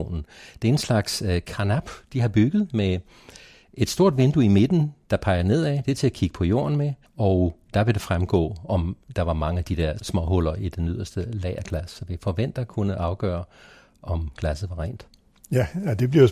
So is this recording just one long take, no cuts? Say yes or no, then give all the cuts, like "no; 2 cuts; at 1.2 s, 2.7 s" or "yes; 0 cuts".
no; 2 cuts; at 7.1 s, 10.0 s